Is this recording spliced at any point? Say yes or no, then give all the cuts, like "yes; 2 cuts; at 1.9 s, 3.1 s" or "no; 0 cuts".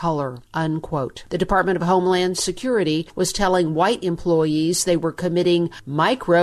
yes; 1 cut; at 1.3 s